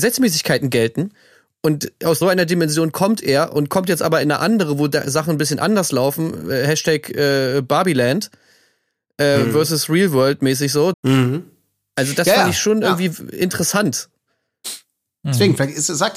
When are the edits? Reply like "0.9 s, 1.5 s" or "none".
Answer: 2.2 s, 10.9 s